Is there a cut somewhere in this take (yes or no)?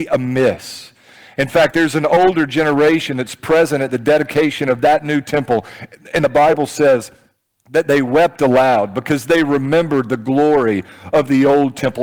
no